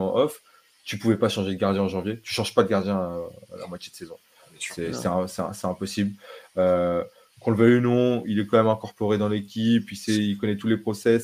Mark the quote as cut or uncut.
uncut